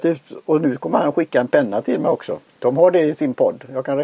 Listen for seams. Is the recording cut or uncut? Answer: cut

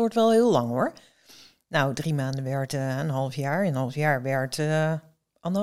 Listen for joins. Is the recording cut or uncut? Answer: uncut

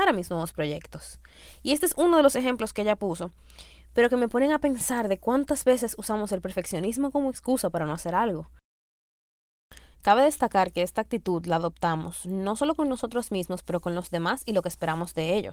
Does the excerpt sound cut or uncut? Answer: uncut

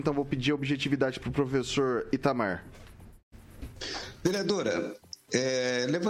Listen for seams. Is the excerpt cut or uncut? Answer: uncut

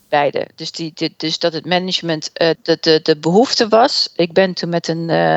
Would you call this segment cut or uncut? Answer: cut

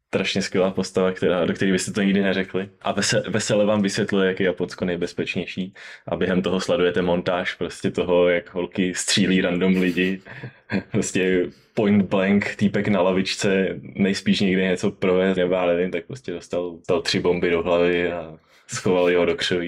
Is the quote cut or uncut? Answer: cut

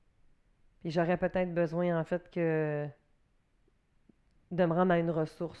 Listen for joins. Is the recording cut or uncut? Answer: uncut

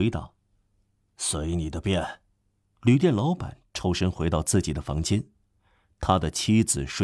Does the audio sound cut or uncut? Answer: cut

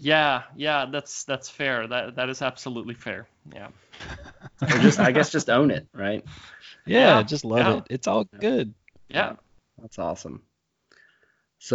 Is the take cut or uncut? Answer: uncut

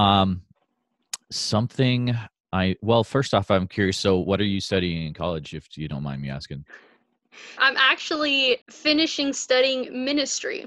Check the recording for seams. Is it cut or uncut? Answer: cut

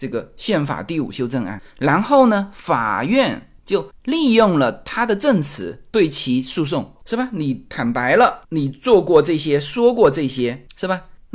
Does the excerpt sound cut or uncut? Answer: uncut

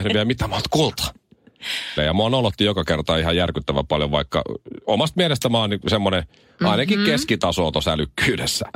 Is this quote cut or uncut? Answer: cut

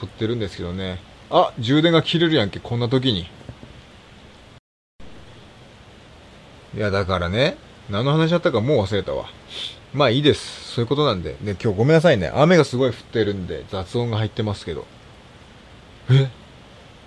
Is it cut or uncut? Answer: uncut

